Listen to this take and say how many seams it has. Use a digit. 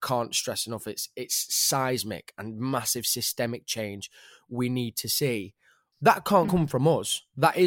0